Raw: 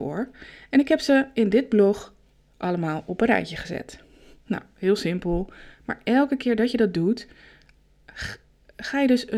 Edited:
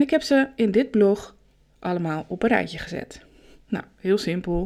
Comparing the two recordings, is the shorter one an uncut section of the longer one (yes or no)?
yes